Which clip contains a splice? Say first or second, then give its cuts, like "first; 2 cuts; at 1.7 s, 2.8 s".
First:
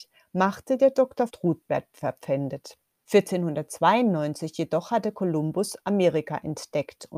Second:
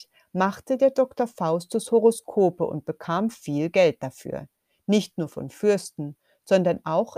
first; 2 cuts; at 1.3 s, 3.0 s